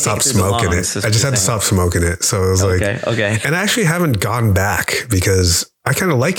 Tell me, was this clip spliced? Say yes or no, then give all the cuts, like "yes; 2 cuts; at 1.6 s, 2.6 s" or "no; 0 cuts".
no; 0 cuts